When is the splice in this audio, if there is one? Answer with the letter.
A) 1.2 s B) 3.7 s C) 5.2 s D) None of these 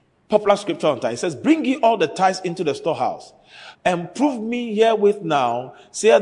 B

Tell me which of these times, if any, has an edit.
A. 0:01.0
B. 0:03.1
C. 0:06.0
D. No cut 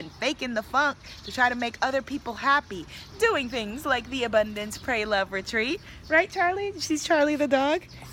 B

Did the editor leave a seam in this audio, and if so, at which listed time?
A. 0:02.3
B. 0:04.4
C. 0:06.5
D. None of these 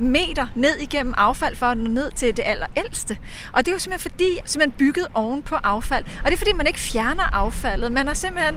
B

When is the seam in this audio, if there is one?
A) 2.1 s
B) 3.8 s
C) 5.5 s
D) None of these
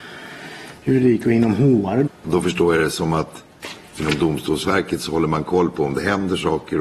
A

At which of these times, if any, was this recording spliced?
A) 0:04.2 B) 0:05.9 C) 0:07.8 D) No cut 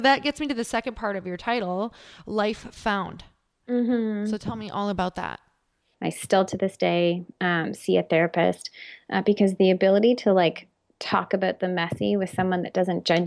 B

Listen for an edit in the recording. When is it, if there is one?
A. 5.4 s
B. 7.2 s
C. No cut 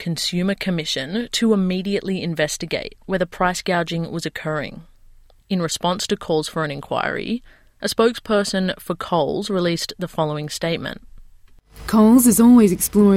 A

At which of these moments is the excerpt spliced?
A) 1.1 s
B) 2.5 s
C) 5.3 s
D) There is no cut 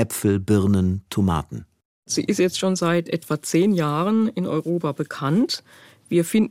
A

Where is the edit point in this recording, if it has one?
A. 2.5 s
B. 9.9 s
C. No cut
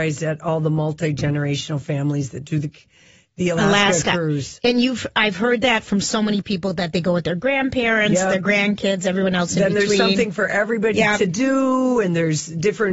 C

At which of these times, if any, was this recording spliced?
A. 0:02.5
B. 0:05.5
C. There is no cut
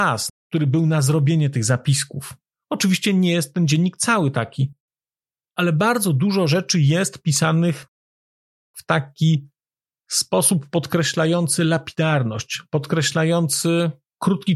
A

